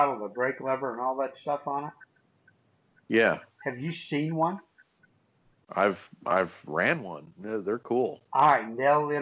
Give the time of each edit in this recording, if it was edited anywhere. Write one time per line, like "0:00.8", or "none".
0:08.3